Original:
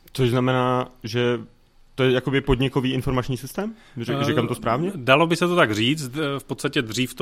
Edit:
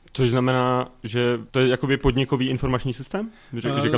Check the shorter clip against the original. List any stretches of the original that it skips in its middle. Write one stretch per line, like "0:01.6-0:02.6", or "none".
0:01.5-0:01.9